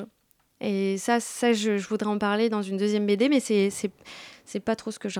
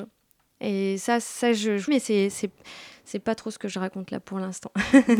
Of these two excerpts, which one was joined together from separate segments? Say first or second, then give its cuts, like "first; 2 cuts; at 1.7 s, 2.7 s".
second; 1 cut; at 1.9 s